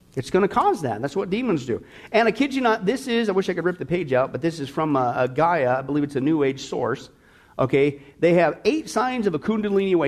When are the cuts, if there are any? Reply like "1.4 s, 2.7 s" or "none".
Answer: none